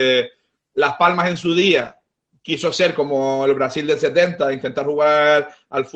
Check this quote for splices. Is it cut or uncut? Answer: uncut